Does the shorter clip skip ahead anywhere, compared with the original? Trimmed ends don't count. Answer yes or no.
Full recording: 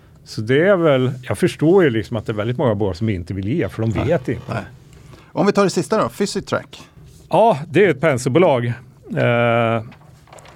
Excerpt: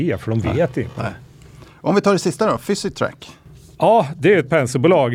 no